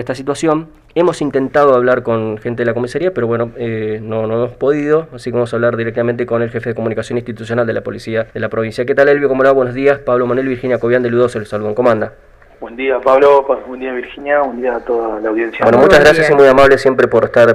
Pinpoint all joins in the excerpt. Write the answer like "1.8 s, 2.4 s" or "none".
8.3 s